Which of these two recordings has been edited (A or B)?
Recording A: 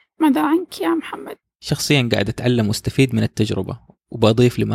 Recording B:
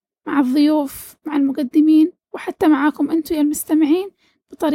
A